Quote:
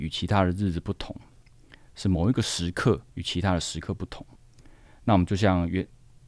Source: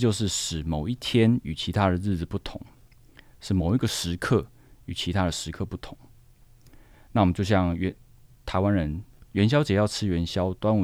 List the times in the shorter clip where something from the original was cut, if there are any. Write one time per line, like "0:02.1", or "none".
0:03.1
0:04.4